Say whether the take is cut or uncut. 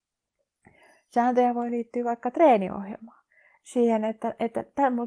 uncut